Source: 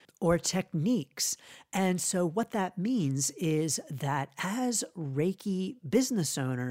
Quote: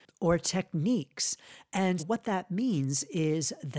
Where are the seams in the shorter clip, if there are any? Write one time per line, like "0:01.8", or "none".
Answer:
0:02.0